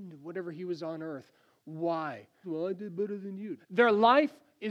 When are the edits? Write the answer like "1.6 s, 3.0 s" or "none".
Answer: 2.4 s, 3.6 s